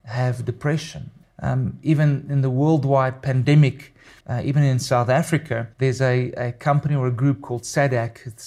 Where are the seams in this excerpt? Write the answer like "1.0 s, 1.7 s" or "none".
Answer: 1.2 s, 4.2 s, 5.7 s